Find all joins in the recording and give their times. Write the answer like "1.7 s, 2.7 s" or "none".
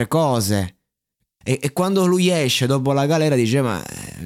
1.4 s